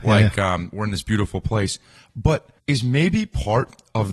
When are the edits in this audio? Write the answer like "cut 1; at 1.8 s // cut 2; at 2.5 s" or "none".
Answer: none